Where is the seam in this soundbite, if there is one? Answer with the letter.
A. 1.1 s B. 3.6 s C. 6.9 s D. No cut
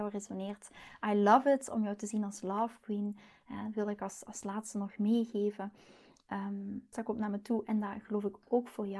C